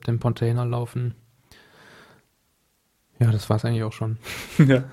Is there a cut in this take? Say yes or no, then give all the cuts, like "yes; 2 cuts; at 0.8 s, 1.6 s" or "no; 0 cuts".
no; 0 cuts